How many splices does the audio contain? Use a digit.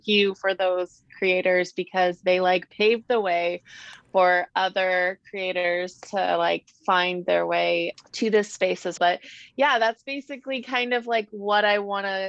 1